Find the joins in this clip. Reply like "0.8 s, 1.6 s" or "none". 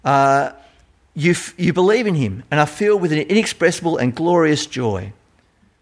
none